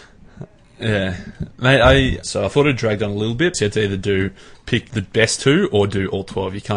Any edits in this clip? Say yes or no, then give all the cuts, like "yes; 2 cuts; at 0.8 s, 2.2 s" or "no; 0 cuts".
yes; 3 cuts; at 2.2 s, 3.5 s, 4.9 s